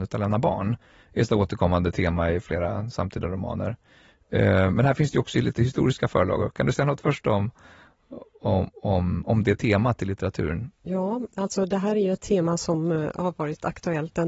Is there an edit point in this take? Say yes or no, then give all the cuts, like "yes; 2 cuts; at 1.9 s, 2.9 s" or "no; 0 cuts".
no; 0 cuts